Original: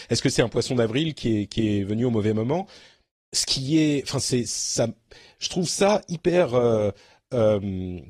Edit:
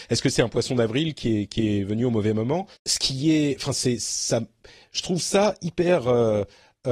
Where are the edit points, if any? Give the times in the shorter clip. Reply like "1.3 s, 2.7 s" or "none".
2.7 s